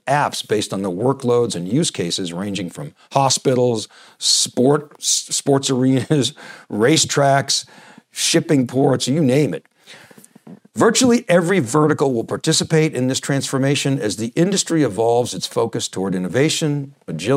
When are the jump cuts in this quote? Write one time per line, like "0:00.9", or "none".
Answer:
none

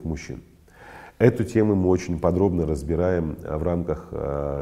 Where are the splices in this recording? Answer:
none

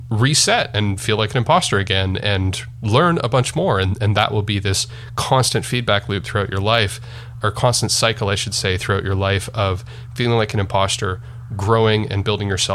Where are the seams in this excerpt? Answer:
0:07.4

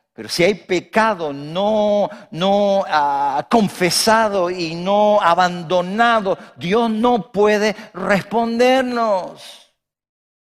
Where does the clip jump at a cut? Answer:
none

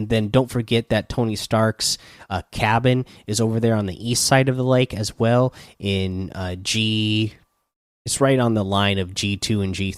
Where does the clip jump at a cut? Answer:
none

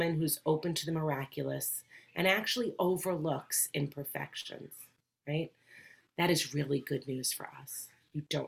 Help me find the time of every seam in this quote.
0:06.0

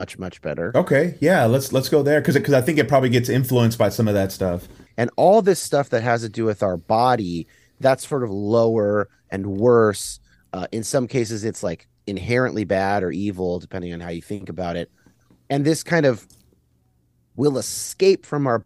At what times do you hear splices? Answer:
0:04.9

